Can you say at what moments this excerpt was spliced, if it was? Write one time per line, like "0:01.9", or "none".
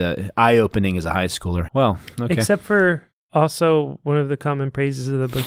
0:01.7